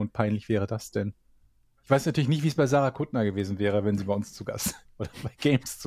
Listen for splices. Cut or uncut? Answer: uncut